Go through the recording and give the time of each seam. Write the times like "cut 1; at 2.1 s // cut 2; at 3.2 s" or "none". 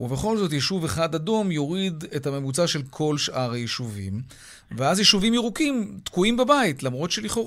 none

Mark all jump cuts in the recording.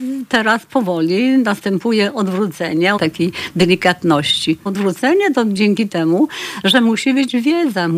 cut 1; at 3.0 s // cut 2; at 4.7 s

